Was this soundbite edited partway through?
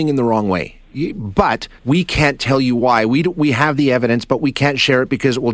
yes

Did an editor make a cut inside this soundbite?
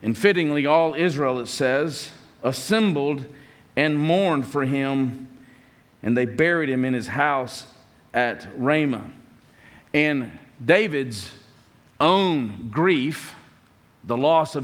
no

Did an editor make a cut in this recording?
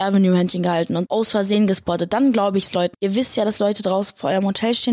yes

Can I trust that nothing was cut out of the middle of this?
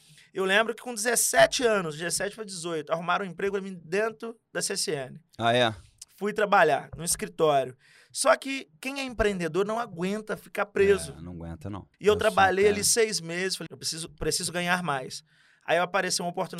no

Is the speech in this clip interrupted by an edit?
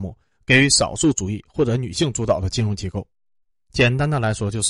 no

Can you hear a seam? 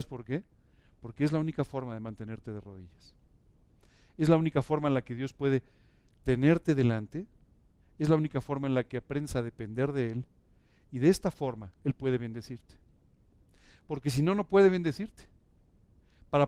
no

